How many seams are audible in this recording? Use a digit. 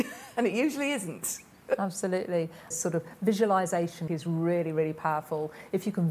2